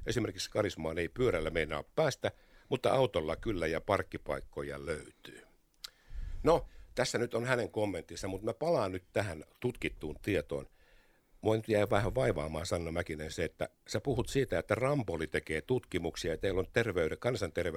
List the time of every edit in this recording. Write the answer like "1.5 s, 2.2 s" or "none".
none